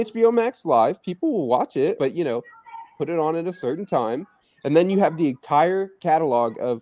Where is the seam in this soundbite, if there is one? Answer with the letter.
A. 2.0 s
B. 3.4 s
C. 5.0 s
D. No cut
A